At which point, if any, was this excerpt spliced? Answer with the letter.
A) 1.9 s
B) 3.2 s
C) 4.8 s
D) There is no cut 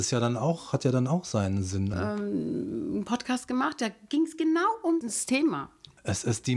A